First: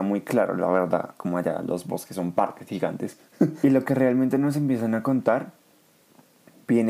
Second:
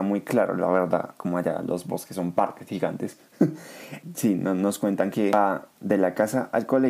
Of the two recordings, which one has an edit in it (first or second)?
first